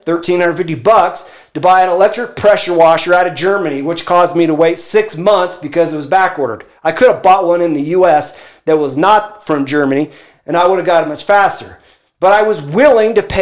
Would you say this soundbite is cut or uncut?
uncut